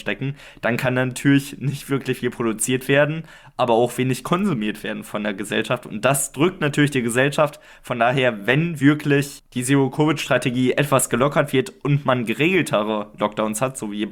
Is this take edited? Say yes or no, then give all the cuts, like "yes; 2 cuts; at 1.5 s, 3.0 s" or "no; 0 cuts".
no; 0 cuts